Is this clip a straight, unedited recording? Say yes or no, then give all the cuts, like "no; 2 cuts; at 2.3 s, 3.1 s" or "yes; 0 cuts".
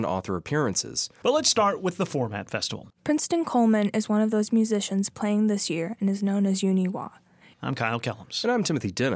no; 3 cuts; at 1.2 s, 2.9 s, 7.5 s